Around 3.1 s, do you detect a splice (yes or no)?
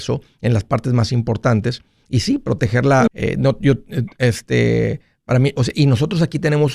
yes